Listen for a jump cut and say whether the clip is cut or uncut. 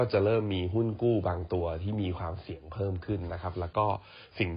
uncut